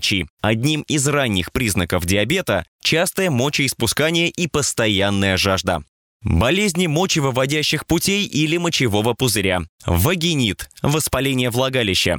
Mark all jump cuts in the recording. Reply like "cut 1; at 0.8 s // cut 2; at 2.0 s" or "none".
cut 1; at 9.7 s